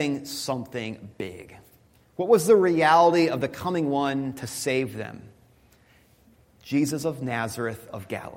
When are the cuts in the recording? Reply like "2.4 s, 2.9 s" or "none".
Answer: 2.0 s